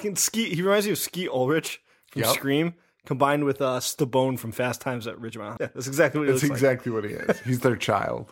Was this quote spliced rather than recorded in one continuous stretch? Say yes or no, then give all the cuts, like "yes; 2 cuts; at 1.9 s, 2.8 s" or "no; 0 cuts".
yes; 1 cut; at 5.6 s